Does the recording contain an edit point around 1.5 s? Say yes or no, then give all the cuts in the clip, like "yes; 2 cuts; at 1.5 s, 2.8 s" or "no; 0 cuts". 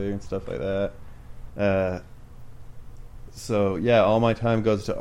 yes; 1 cut; at 1.5 s